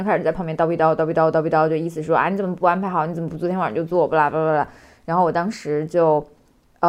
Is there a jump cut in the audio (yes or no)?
no